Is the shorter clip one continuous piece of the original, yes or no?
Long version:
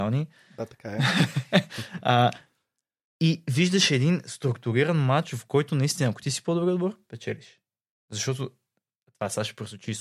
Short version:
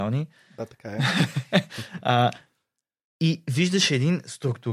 yes